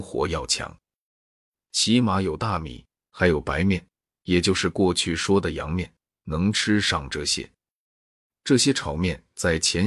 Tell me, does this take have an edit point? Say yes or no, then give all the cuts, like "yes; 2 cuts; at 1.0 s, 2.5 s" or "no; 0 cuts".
no; 0 cuts